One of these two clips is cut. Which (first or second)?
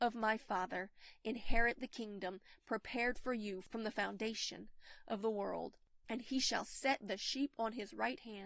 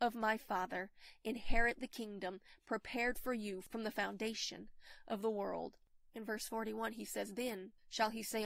first